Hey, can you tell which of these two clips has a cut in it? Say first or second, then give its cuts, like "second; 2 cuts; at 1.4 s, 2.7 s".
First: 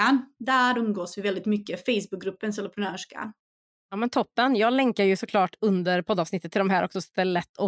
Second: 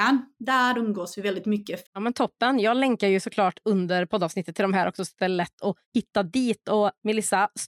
second; 2 cuts; at 1.8 s, 5.8 s